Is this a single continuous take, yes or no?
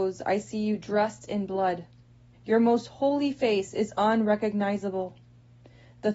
no